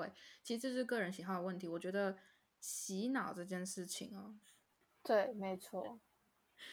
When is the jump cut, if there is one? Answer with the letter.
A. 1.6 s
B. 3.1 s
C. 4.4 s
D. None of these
C